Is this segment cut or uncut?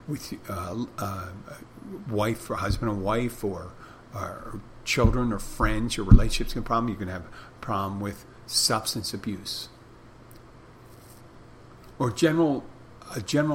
uncut